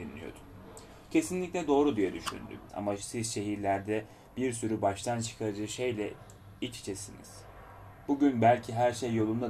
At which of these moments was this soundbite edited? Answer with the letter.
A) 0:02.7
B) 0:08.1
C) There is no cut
A